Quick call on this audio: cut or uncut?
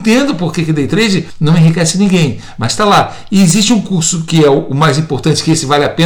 uncut